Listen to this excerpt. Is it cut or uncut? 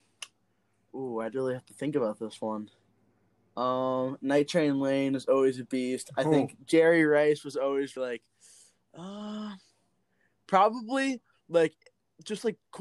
cut